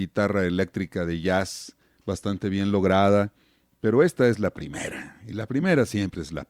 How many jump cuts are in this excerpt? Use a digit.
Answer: 0